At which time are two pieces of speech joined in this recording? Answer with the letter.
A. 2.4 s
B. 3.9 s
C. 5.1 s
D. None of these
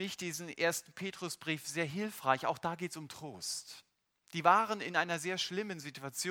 D